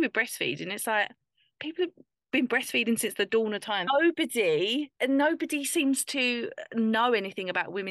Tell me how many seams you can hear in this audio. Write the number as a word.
two